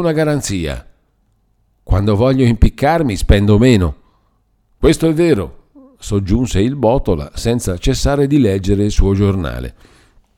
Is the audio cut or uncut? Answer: uncut